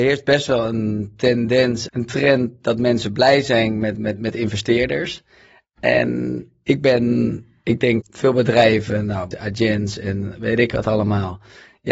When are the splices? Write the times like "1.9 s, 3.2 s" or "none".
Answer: 1.9 s, 8.0 s, 9.3 s